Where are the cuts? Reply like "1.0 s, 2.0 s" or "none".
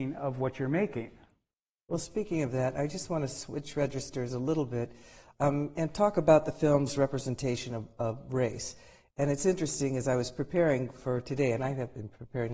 none

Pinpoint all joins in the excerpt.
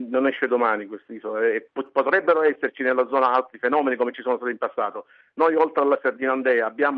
1.7 s

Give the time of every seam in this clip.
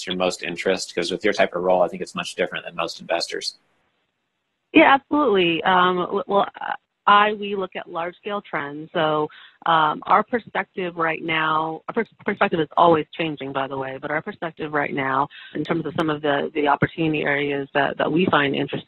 15.5 s

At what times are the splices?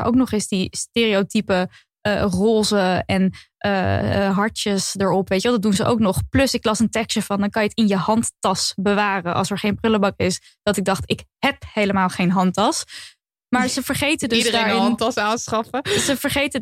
none

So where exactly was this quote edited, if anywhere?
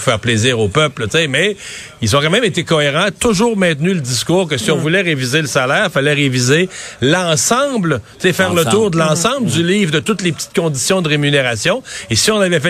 none

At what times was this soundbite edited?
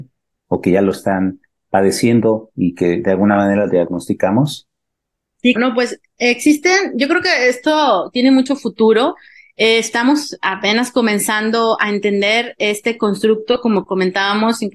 5.6 s

